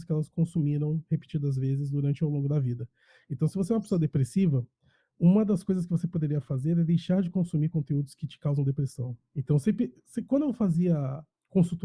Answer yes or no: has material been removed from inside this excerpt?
no